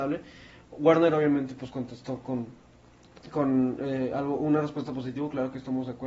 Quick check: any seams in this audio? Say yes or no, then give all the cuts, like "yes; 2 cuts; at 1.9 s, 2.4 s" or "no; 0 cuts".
no; 0 cuts